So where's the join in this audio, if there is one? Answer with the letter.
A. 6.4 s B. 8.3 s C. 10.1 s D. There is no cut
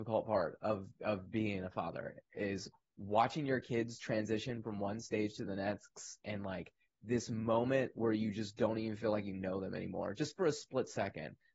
D